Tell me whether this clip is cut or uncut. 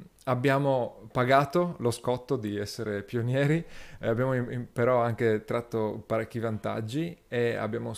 uncut